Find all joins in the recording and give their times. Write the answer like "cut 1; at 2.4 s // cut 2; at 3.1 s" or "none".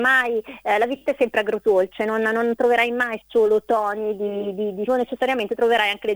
cut 1; at 4.9 s